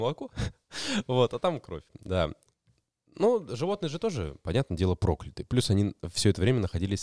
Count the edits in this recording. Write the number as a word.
zero